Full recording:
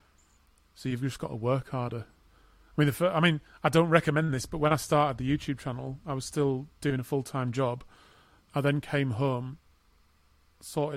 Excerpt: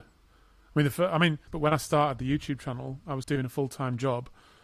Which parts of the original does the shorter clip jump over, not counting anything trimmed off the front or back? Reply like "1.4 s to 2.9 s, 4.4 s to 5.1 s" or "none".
3.5 s to 4.5 s, 6.2 s to 6.8 s